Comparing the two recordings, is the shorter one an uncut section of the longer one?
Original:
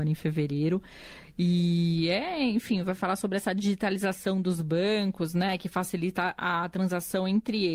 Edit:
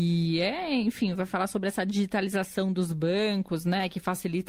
yes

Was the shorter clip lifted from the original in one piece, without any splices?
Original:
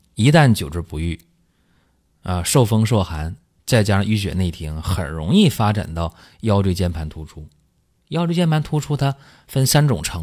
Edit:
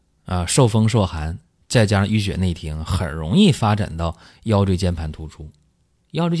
yes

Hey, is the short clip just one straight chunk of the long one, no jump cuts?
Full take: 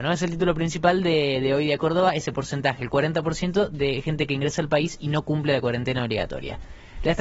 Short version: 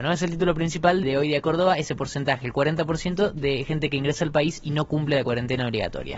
no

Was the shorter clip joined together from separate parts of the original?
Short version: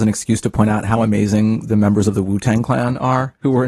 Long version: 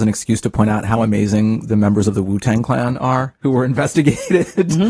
no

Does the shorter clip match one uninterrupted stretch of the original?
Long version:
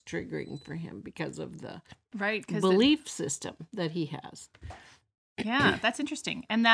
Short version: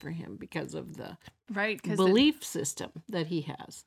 yes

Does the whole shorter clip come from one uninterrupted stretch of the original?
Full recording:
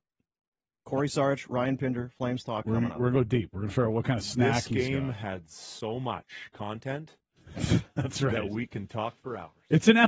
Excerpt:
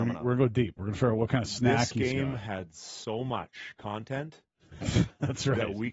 yes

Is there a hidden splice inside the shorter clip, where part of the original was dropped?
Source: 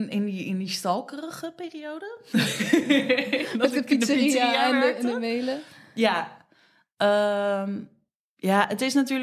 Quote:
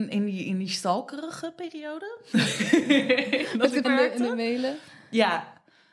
yes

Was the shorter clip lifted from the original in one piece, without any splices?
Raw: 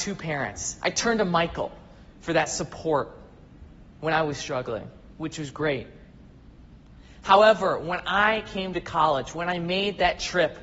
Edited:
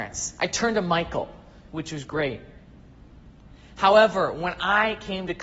no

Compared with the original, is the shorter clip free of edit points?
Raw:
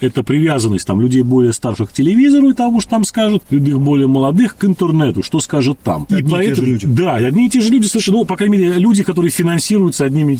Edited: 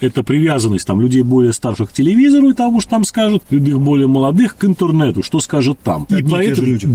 yes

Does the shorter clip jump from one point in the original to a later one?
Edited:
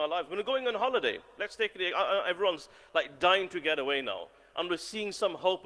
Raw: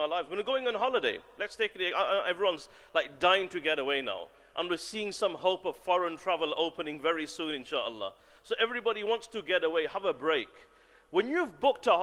no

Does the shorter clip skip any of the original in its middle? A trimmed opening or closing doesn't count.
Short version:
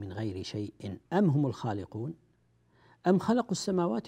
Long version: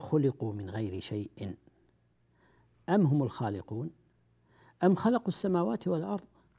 yes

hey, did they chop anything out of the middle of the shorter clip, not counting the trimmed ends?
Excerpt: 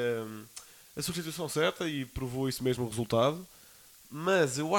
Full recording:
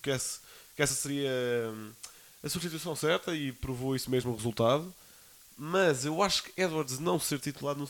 no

